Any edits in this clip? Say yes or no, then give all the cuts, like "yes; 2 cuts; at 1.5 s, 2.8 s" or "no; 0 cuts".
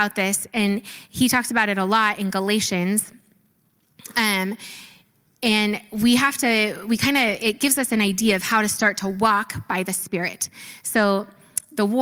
no; 0 cuts